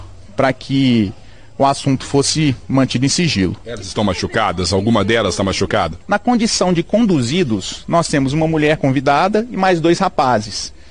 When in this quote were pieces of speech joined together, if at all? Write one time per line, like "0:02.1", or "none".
0:06.0